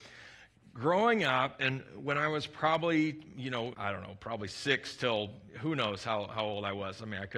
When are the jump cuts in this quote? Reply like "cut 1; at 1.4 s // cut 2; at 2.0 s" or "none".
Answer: cut 1; at 3.7 s // cut 2; at 5.5 s